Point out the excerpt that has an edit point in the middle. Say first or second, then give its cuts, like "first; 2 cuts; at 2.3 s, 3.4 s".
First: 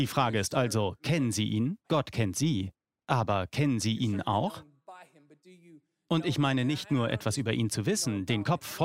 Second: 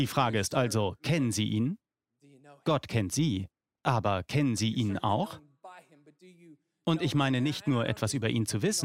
first; 1 cut; at 1.8 s